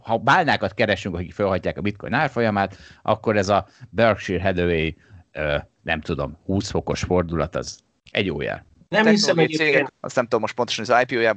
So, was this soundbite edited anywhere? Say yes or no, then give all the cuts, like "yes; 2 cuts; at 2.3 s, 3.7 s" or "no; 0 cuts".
yes; 1 cut; at 9.9 s